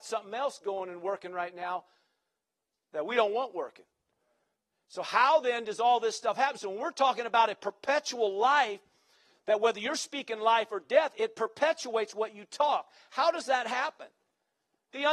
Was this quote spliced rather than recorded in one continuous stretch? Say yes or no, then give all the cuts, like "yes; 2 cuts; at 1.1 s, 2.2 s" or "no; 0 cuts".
no; 0 cuts